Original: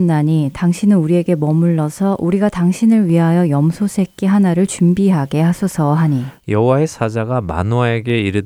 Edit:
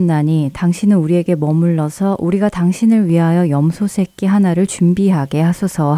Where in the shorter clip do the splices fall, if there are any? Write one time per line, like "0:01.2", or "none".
none